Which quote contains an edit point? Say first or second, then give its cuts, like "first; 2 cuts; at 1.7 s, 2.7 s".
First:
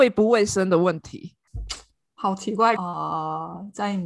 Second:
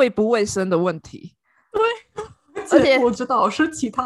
first; 2 cuts; at 1.5 s, 2.8 s